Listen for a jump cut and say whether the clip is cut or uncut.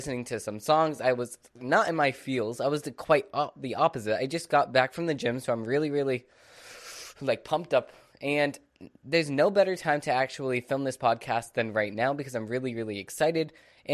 uncut